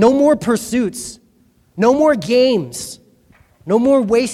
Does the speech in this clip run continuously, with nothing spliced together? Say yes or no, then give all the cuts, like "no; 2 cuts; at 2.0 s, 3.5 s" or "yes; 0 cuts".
yes; 0 cuts